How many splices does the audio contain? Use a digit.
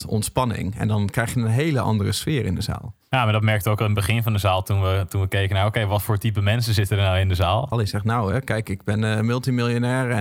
1